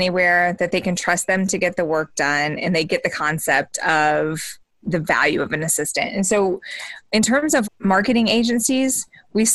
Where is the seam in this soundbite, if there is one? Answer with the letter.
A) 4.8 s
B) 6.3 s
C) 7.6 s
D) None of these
C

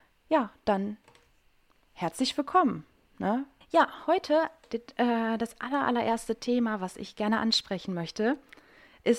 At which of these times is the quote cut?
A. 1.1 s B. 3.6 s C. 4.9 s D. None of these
B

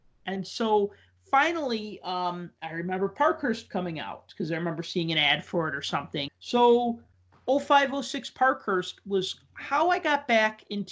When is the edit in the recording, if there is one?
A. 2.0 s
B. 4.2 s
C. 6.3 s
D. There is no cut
C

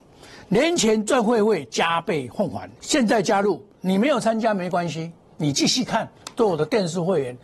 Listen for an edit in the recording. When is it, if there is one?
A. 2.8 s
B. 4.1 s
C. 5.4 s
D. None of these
A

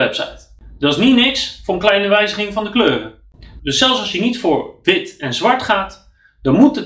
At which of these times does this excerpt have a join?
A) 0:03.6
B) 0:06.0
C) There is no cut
A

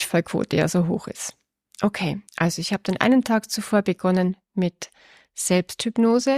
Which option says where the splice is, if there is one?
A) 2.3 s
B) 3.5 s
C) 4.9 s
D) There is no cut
A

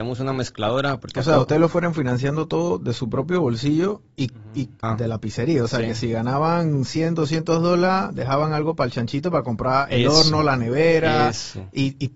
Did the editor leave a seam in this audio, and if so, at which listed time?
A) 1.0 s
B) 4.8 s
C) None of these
B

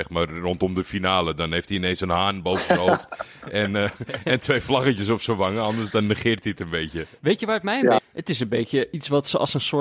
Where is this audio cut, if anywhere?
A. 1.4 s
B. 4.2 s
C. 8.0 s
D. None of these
C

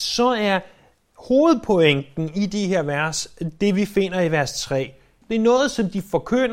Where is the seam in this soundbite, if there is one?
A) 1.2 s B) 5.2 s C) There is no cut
B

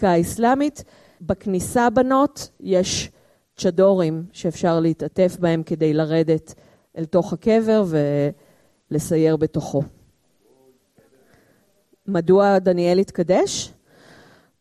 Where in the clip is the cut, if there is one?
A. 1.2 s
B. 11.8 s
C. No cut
A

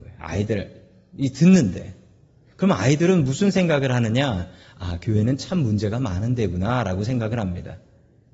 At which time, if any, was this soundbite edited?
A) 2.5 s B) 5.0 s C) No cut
C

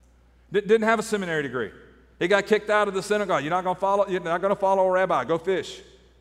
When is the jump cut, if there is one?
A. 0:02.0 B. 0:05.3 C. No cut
B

